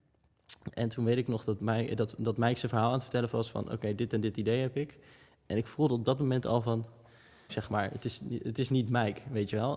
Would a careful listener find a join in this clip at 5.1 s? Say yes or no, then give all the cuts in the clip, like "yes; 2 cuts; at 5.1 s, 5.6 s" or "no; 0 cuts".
no; 1 cut; at 7.5 s